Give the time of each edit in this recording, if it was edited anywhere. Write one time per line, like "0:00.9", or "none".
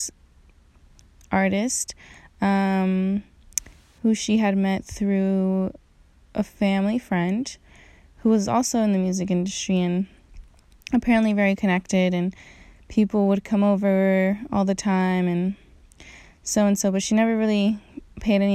none